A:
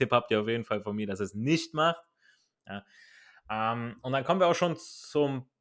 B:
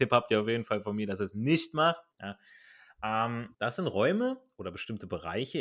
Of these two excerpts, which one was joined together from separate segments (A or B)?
B